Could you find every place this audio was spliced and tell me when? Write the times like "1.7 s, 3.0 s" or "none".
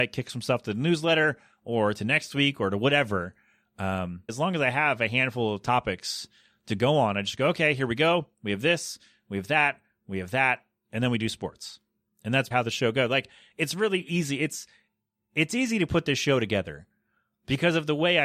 4.3 s, 12.5 s